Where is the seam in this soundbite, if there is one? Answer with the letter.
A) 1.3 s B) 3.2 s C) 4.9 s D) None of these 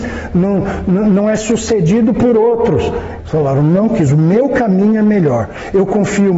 B